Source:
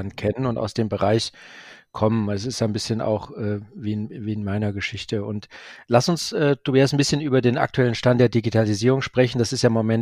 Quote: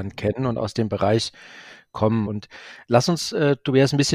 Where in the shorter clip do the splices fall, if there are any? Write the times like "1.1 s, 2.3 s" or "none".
2.3 s